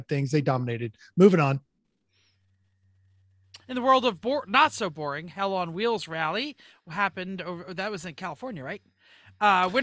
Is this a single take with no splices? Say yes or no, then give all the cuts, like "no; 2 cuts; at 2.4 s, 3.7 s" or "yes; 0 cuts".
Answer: yes; 0 cuts